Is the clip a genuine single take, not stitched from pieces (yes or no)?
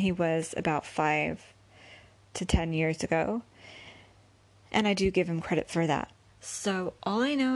no